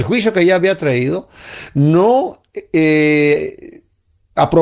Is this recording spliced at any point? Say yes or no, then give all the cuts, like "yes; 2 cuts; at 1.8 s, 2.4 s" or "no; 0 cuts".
no; 0 cuts